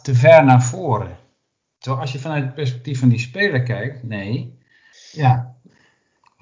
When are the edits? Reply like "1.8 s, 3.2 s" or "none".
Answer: 4.9 s